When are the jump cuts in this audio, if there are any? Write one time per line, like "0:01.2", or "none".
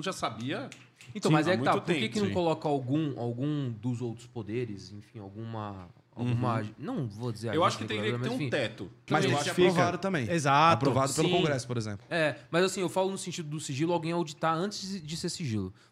0:09.1